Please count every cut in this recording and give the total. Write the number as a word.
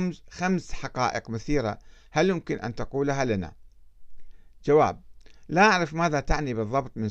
zero